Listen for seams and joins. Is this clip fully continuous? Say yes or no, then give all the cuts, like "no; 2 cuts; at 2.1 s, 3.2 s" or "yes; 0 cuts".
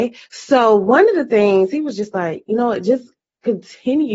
yes; 0 cuts